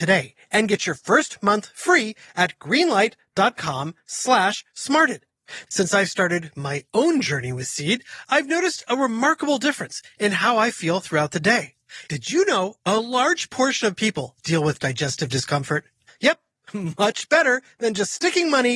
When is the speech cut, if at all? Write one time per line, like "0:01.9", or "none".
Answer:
0:05.7
0:12.1
0:16.1